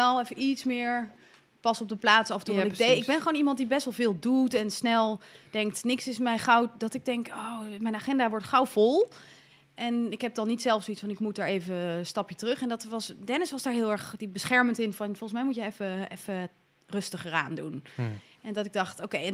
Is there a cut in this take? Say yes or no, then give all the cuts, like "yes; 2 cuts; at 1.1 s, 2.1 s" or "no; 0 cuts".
no; 0 cuts